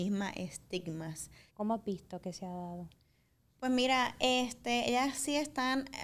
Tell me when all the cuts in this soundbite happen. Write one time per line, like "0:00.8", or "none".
0:01.5